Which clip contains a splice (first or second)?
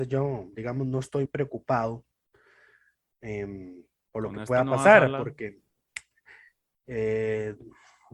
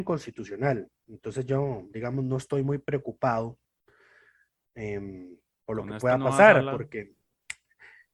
first